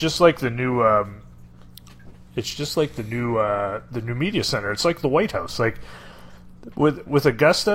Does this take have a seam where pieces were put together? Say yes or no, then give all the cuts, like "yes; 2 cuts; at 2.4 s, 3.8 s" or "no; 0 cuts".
no; 0 cuts